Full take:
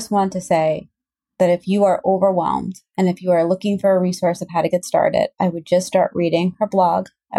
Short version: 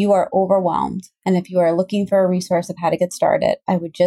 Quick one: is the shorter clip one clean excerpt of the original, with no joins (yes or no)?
yes